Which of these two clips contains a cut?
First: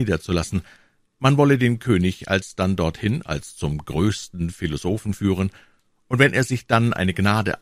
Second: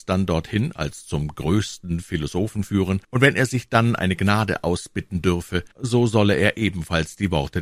second; 2 cuts; at 3.0 s, 5.7 s

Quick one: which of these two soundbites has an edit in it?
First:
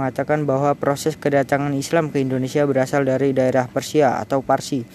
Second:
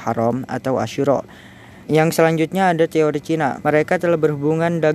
second; 2 cuts; at 1.8 s, 3.6 s

